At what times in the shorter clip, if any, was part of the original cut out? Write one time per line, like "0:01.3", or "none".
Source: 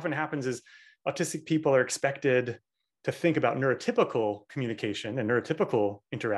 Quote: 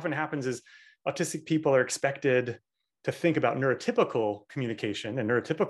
none